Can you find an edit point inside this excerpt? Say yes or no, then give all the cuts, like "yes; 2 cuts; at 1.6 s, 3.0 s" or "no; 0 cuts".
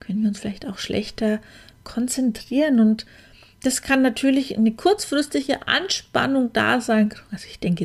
no; 0 cuts